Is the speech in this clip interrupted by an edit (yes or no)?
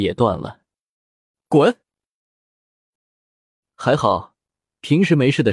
yes